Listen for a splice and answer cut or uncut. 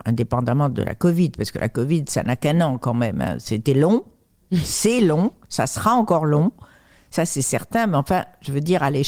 uncut